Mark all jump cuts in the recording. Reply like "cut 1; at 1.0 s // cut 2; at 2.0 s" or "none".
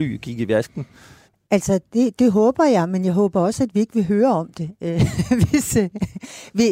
cut 1; at 1.3 s